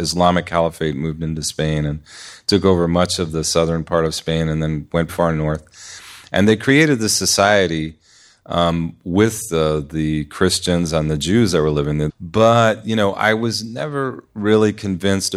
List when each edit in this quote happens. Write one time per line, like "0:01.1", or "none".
0:05.1
0:12.1